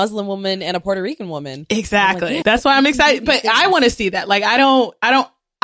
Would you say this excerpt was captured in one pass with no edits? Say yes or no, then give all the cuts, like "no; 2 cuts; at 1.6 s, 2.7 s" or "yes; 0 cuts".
no; 1 cut; at 2.4 s